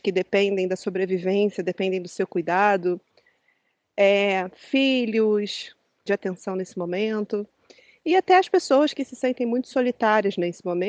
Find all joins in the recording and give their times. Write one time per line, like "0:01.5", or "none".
0:06.1